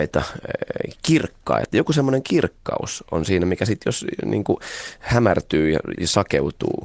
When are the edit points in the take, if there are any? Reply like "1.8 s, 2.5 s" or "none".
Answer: 5.9 s